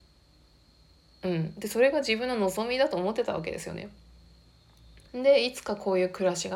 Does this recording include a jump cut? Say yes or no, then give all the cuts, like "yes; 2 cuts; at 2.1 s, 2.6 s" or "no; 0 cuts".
yes; 1 cut; at 5.1 s